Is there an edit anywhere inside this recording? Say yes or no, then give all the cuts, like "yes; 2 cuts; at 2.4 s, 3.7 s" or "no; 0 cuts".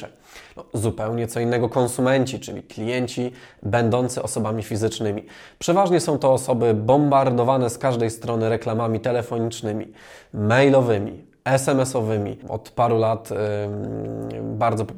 yes; 1 cut; at 12.4 s